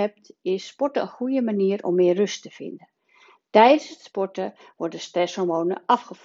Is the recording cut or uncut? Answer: uncut